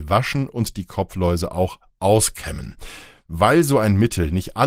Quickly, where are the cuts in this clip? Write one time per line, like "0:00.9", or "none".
none